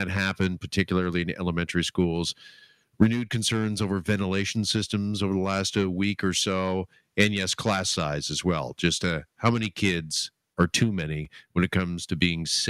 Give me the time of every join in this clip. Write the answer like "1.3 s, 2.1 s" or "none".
none